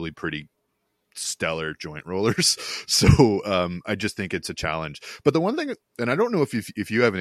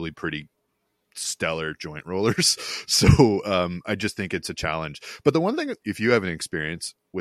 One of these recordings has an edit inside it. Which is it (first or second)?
second